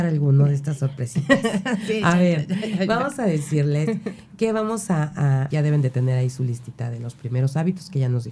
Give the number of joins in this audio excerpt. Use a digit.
1